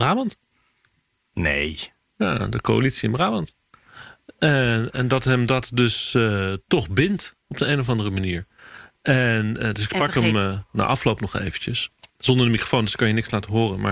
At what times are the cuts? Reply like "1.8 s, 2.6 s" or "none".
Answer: 12.1 s